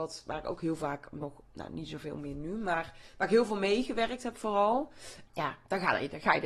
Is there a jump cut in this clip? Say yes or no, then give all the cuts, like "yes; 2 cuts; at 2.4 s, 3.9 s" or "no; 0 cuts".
yes; 1 cut; at 5.3 s